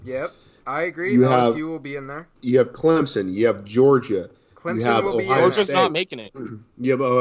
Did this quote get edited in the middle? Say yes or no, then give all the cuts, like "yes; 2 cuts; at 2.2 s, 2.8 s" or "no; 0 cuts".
yes; 1 cut; at 2.4 s